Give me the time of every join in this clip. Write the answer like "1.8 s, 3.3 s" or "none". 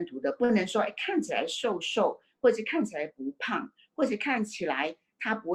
none